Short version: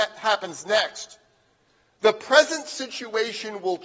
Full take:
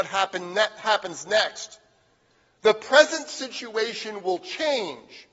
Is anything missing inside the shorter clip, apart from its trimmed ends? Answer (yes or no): no